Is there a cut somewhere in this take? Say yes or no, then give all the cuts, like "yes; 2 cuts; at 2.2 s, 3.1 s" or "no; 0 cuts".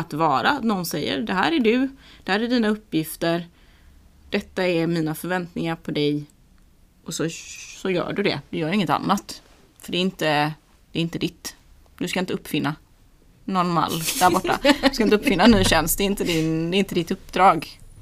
no; 0 cuts